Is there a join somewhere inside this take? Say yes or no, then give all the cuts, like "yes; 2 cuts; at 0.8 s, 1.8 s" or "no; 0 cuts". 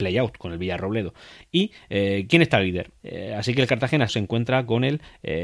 yes; 2 cuts; at 3.0 s, 4.1 s